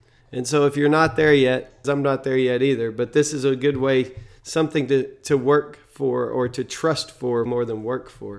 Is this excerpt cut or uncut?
cut